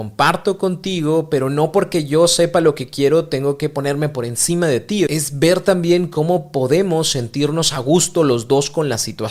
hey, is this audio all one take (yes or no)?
yes